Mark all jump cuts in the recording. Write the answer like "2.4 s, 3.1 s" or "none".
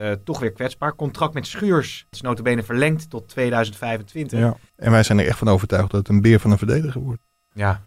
2.1 s, 4.7 s